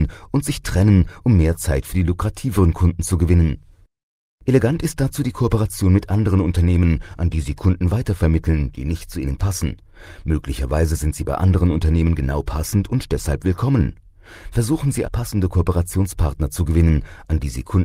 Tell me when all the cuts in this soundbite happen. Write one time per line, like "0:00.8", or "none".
0:15.0